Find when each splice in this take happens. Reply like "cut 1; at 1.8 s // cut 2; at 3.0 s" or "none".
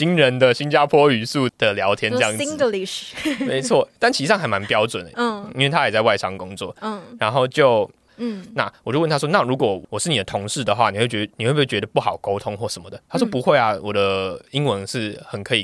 cut 1; at 1.5 s // cut 2; at 8.1 s